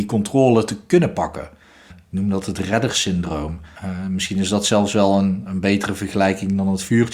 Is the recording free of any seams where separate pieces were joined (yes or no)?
no